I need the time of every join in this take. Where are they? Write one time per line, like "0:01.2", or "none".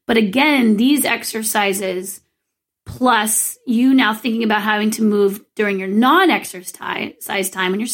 none